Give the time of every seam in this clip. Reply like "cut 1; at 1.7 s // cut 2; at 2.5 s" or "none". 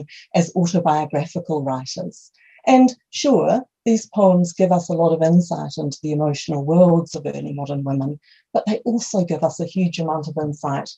none